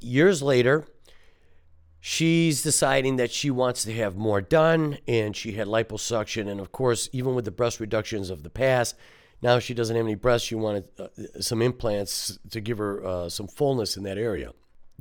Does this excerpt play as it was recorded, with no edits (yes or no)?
yes